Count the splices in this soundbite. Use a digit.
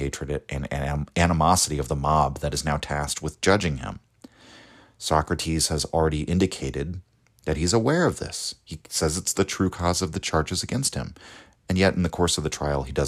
0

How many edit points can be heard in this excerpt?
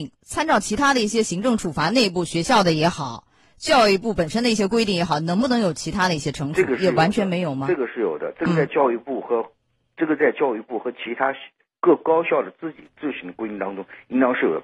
0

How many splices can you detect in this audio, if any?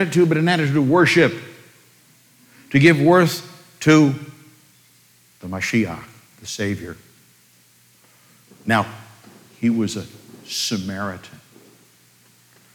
1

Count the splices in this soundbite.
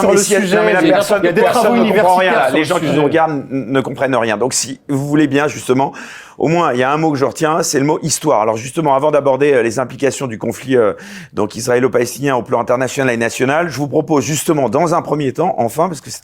0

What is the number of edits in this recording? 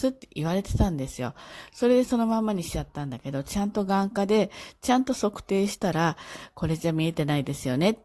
0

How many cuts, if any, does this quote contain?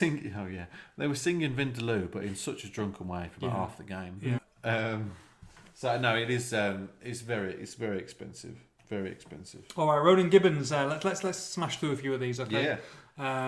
1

